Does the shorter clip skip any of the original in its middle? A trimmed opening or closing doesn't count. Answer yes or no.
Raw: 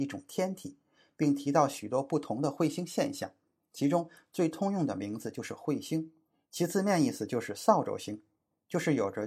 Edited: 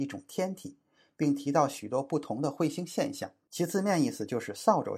yes